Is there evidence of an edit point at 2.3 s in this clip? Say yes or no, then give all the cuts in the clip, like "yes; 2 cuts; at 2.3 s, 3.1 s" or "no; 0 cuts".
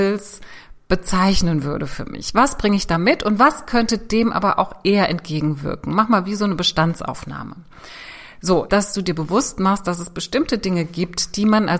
no; 1 cut; at 8.7 s